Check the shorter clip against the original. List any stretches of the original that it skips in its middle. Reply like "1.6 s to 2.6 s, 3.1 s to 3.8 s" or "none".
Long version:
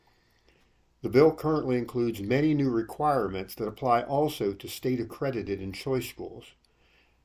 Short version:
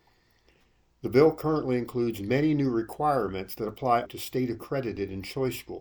4.0 s to 4.5 s